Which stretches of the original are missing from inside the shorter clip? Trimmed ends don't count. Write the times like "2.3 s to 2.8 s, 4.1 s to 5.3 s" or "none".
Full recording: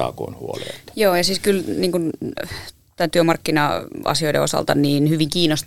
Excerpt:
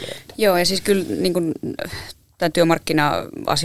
none